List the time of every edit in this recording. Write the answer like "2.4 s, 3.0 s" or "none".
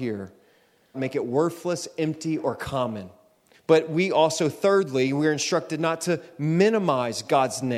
0.9 s, 3.5 s